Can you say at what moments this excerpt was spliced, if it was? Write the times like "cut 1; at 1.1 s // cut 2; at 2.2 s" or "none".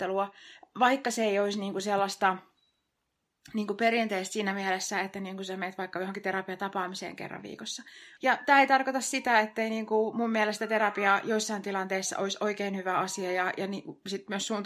cut 1; at 8.2 s

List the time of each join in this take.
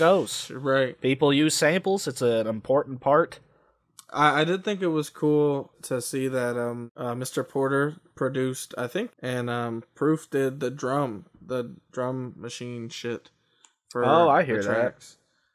cut 1; at 9.1 s

